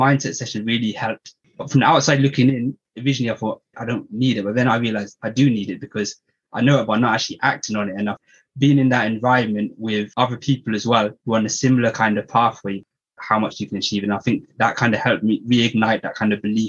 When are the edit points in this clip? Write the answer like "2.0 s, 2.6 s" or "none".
3.7 s, 13.2 s